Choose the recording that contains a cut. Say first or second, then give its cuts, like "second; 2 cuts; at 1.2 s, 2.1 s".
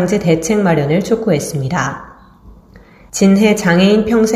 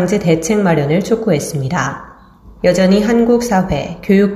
second; 1 cut; at 2.6 s